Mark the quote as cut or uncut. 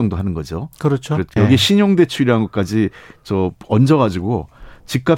cut